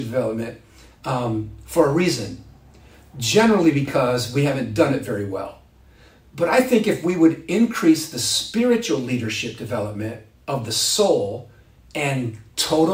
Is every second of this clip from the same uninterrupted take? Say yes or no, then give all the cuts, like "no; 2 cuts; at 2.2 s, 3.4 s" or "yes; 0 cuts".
yes; 0 cuts